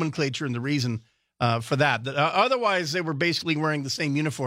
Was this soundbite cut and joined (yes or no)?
no